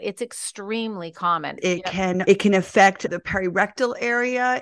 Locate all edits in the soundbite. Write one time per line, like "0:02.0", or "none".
0:01.6